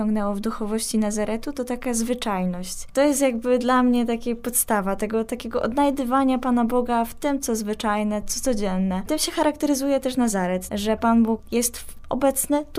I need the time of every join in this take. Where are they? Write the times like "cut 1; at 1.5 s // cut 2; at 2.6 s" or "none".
cut 1; at 8.2 s // cut 2; at 10.7 s

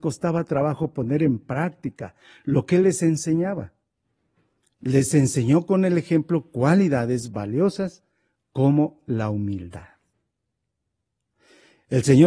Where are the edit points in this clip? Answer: cut 1; at 4.7 s

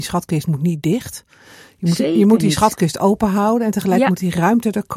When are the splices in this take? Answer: none

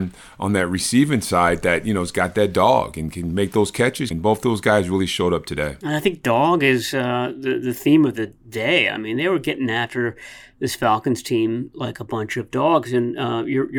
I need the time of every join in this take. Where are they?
cut 1; at 4.1 s

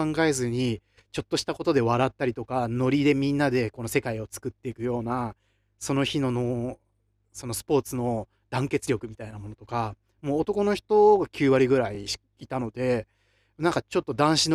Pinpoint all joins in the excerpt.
none

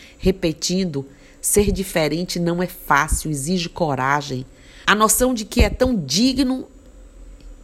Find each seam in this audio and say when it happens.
cut 1; at 4.8 s

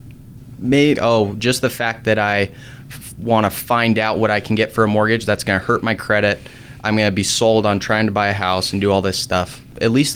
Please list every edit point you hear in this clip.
cut 1; at 1.0 s

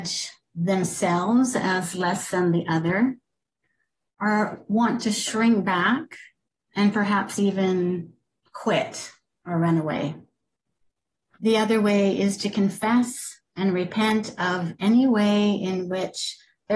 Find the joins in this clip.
cut 1; at 11.3 s

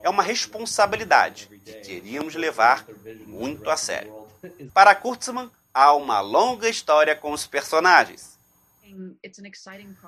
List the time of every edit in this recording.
cut 1; at 4.7 s

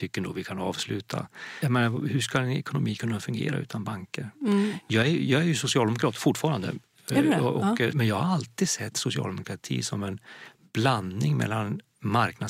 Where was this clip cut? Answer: cut 1; at 1.6 s // cut 2; at 7.9 s

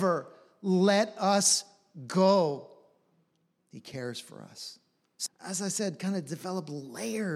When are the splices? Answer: cut 1; at 3.6 s // cut 2; at 5.3 s

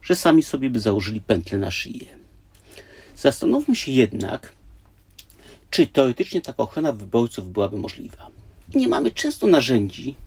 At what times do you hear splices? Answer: cut 1; at 8.7 s

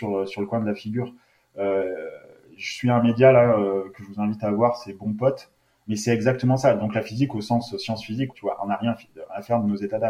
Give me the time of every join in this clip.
cut 1; at 5.8 s // cut 2; at 8.3 s

